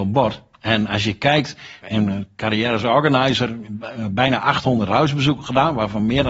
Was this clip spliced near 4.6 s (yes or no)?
no